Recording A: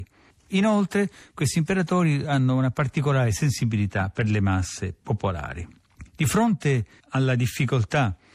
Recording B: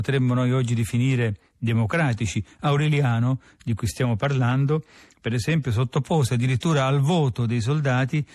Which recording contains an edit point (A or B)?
A